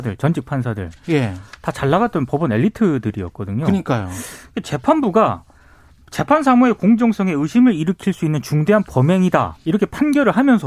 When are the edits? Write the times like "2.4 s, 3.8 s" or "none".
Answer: none